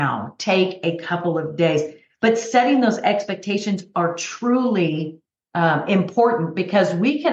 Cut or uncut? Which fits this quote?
uncut